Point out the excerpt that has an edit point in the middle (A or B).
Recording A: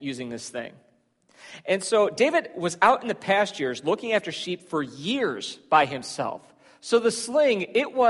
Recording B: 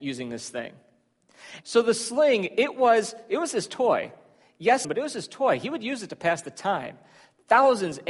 B